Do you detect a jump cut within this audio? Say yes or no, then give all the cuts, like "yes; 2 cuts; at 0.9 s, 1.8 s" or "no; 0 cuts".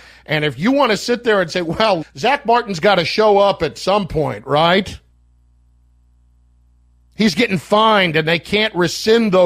yes; 1 cut; at 2.0 s